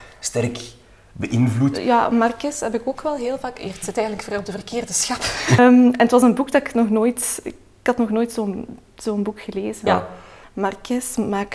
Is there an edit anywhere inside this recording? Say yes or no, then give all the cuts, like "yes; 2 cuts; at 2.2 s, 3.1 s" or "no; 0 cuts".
yes; 2 cuts; at 5.6 s, 9.9 s